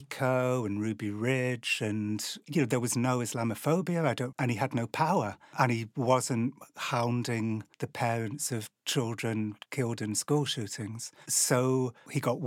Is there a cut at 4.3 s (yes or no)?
yes